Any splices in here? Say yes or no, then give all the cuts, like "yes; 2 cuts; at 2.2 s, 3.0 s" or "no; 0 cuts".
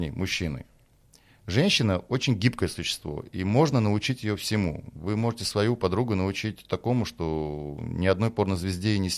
no; 0 cuts